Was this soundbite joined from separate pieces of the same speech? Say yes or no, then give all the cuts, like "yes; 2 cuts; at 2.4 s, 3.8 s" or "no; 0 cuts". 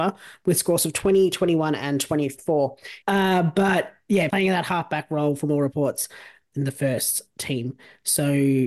yes; 2 cuts; at 3.0 s, 4.3 s